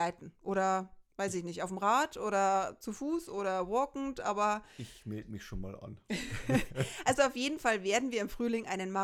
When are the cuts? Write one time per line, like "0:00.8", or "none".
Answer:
none